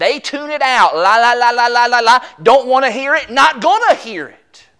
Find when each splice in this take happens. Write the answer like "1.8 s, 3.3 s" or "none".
none